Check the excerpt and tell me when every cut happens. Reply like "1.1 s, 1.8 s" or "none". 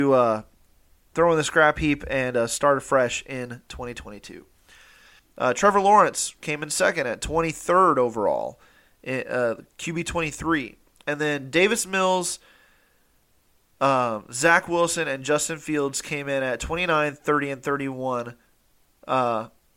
5.2 s

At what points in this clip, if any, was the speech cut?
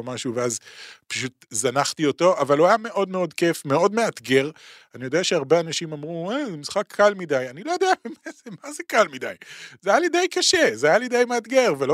none

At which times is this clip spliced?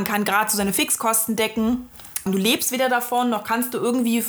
2.3 s

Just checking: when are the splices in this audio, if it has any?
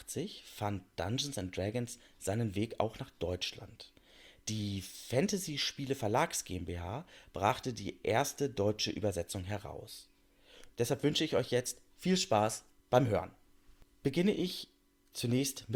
10.7 s

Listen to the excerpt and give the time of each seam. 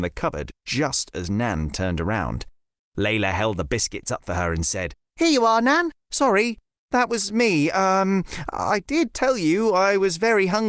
6.0 s

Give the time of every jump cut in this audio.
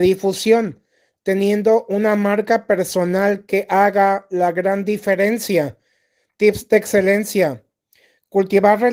none

